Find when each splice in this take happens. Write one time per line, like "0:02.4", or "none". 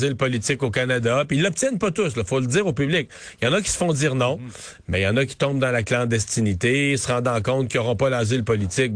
none